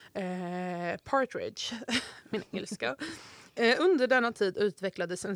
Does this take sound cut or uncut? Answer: uncut